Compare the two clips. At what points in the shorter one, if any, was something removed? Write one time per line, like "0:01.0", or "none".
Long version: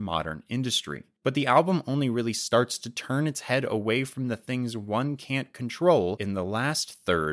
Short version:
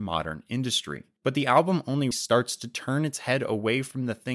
0:02.1

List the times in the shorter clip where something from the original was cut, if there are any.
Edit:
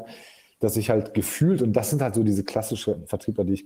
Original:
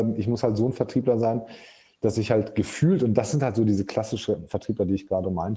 none

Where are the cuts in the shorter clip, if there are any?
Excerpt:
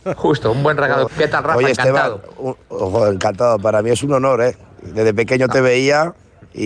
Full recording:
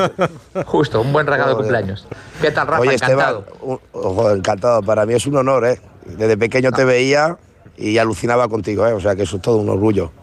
0:01.1

